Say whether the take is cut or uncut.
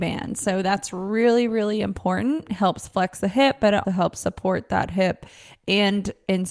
cut